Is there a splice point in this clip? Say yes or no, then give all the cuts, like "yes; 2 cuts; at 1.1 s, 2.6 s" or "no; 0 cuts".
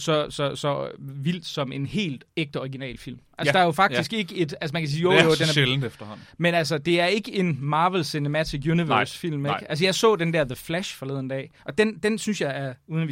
yes; 1 cut; at 2.3 s